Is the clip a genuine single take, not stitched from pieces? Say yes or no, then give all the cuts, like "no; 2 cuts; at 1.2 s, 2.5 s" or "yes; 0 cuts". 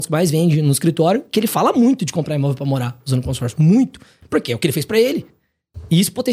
yes; 0 cuts